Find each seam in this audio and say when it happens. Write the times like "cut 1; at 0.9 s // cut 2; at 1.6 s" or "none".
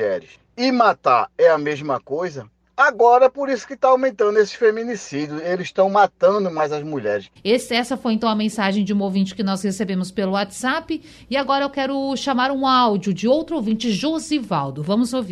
cut 1; at 7.4 s